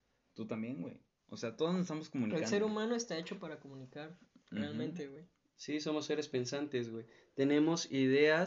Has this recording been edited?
no; 0 cuts

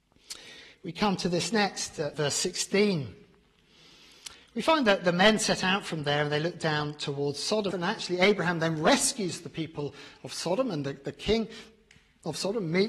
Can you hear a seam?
yes; 2 cuts; at 2.1 s, 7.7 s

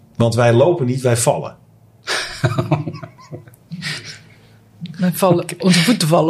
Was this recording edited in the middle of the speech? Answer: no; 0 cuts

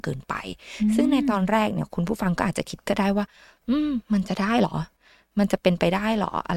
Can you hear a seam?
no; 0 cuts

